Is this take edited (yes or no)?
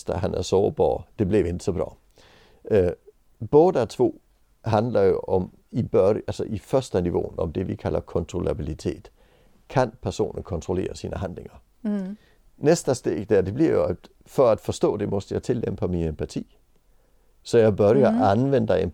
yes